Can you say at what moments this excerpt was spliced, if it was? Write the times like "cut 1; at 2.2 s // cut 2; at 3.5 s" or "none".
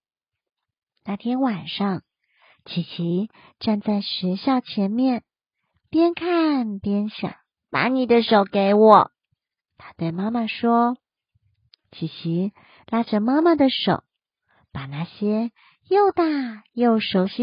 cut 1; at 7.5 s